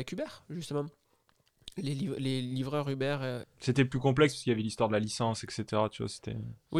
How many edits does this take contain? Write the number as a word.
one